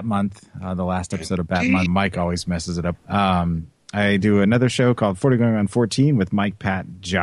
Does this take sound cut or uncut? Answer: cut